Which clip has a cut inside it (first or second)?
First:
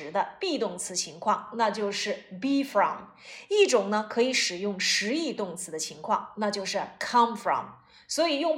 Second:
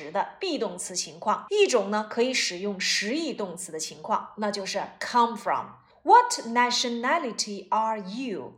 second